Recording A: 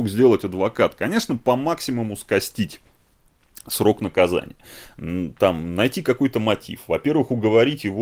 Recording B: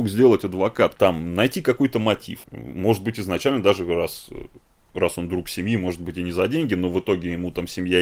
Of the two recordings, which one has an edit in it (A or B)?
B